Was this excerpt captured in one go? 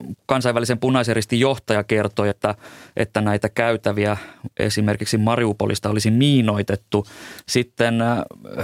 yes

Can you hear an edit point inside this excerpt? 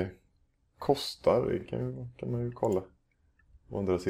no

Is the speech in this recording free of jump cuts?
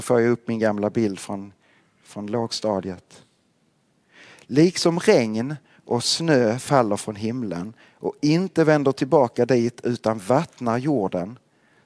yes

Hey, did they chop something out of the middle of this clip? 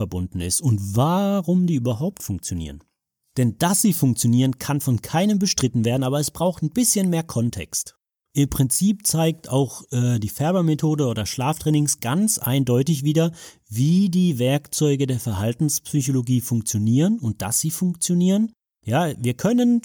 no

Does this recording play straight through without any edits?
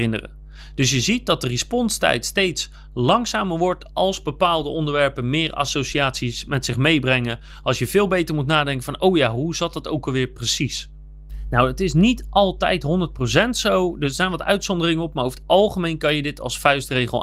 yes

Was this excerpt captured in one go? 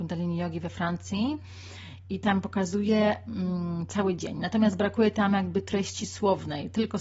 yes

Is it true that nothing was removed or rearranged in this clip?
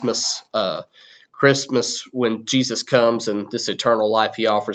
yes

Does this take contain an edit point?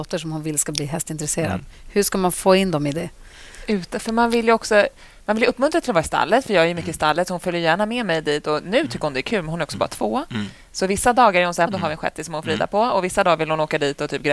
yes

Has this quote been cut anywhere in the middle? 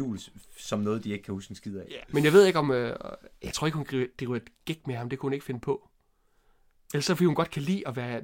yes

